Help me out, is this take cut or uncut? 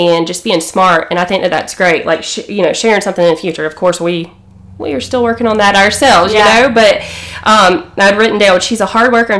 uncut